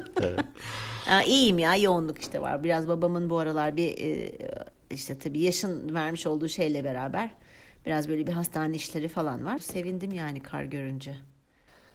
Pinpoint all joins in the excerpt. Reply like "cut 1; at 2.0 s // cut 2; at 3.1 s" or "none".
cut 1; at 9.6 s